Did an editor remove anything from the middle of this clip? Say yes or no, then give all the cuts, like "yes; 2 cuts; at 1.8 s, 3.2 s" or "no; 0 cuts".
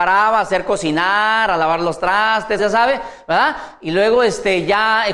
yes; 1 cut; at 2.6 s